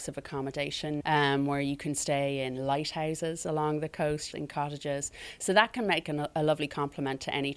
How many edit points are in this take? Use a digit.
2